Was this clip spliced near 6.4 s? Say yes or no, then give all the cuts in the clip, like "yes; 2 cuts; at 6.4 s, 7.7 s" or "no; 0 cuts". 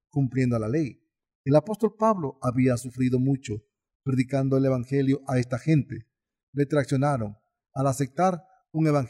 yes; 1 cut; at 6.4 s